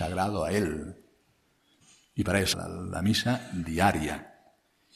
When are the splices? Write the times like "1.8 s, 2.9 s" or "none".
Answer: 2.5 s